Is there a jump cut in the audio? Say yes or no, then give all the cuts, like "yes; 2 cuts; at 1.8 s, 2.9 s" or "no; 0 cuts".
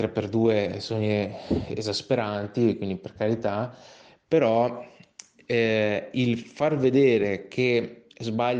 no; 0 cuts